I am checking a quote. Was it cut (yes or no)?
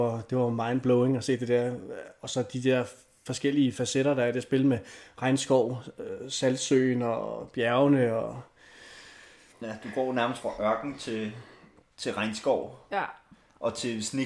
yes